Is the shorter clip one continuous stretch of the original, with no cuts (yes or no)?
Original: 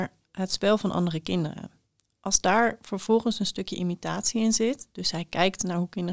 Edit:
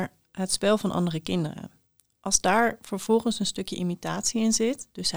yes